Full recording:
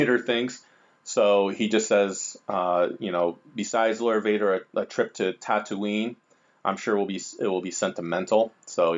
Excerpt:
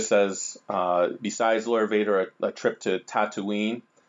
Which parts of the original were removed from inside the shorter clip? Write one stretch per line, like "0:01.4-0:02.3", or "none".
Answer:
0:03.0-0:03.5